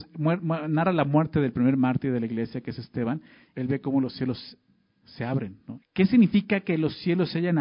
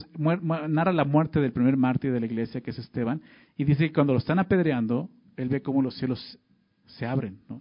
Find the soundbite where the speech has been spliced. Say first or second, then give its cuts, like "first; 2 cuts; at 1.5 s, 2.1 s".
first; 2 cuts; at 3.5 s, 5.8 s